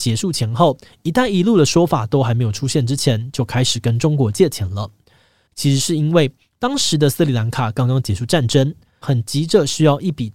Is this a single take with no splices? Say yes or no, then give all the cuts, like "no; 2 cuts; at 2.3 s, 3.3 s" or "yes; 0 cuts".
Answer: no; 2 cuts; at 5.5 s, 9.0 s